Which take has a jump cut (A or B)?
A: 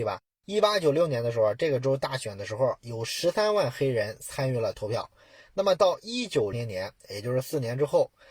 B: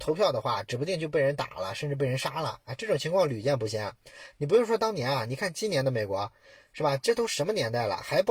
A